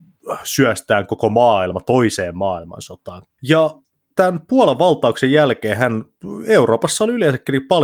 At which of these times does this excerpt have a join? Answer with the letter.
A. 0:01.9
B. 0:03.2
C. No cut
B